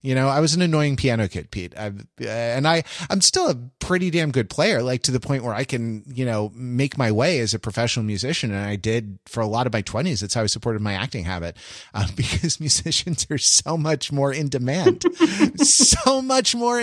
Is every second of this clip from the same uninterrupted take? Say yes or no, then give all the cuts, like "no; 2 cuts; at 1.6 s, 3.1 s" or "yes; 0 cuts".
yes; 0 cuts